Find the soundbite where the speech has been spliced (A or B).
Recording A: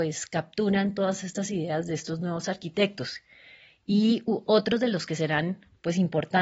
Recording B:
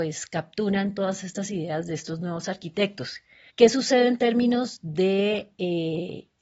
B